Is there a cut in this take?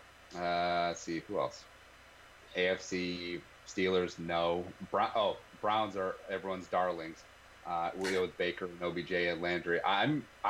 no; 0 cuts

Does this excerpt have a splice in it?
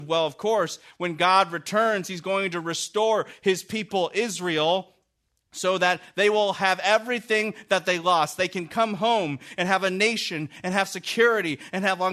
no; 0 cuts

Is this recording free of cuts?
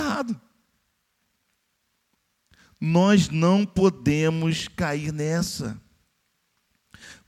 yes; 0 cuts

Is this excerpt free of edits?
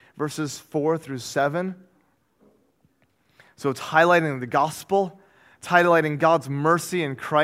yes; 0 cuts

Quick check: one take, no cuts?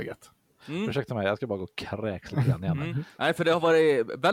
yes; 0 cuts

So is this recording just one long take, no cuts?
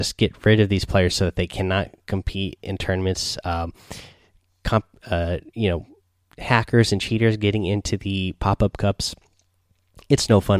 yes; 0 cuts

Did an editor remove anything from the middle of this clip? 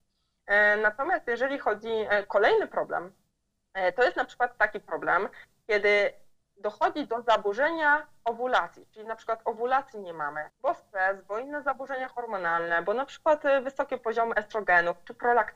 yes; 1 cut; at 10.5 s

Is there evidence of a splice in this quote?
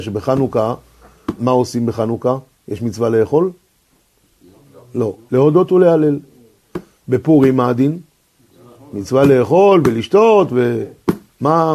yes; 2 cuts; at 1.4 s, 5.3 s

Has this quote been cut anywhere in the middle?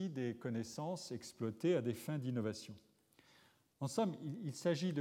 yes; 1 cut; at 3.7 s

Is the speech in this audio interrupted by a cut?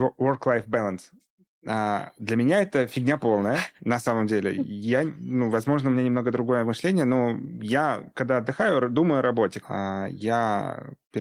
yes; 1 cut; at 9.6 s

